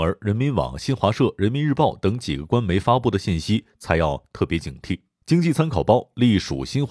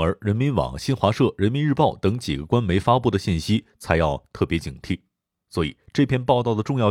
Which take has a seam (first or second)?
first